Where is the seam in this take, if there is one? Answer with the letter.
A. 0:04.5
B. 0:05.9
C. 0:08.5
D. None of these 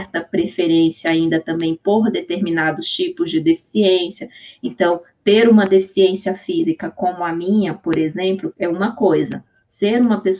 C